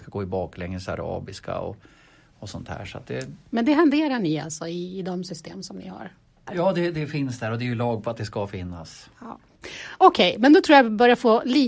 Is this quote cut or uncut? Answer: cut